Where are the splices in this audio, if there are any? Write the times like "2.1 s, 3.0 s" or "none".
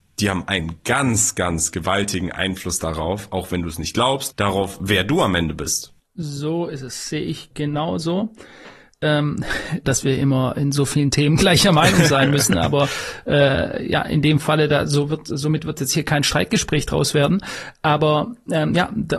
4.3 s, 9.8 s